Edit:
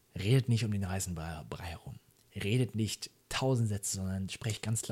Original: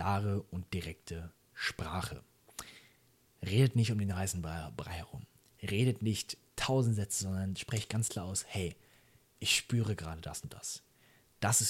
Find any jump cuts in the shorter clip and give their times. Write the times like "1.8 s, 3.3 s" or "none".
none